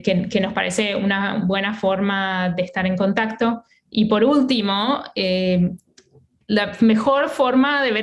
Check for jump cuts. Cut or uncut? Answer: uncut